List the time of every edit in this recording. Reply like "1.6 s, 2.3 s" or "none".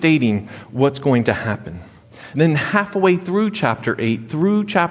2.3 s